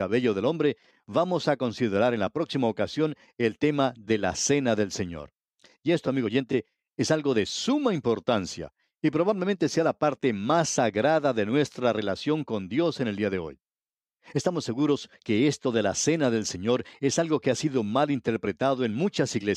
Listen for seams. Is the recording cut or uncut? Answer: uncut